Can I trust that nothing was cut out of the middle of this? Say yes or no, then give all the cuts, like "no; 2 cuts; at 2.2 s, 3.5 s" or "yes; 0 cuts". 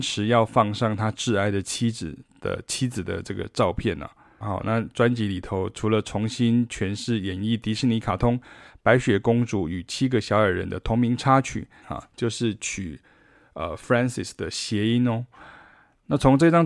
no; 2 cuts; at 4.4 s, 11.8 s